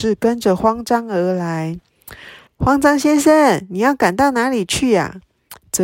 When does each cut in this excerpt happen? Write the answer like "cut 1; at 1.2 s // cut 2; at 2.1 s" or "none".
cut 1; at 2.5 s